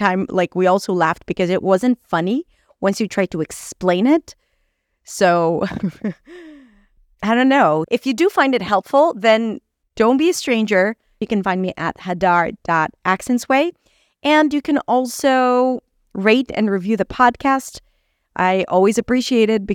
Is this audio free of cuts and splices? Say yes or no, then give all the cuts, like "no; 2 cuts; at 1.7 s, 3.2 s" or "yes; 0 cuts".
no; 2 cuts; at 7.8 s, 11.2 s